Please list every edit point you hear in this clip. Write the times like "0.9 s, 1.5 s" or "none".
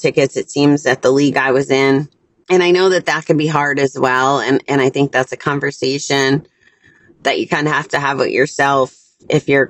none